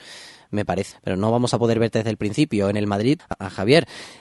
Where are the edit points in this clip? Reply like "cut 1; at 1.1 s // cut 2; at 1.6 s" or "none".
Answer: cut 1; at 0.9 s // cut 2; at 3.2 s